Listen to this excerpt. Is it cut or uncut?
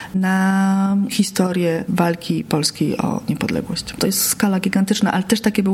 cut